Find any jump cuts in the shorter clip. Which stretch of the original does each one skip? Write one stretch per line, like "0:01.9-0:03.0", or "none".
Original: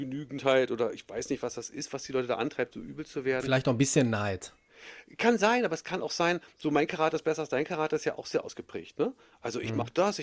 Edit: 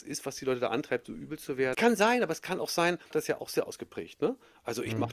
0:03.4-0:05.2
0:06.5-0:07.9